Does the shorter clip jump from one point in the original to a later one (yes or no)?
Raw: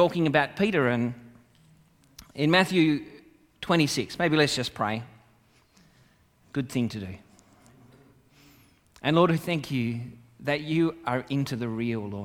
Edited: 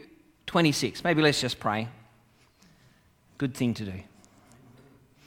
no